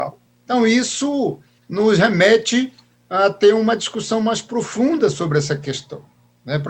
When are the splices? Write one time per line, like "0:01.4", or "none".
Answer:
none